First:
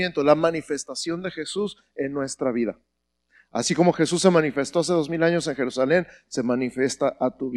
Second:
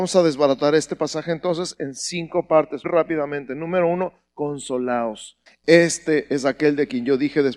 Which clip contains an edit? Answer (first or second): second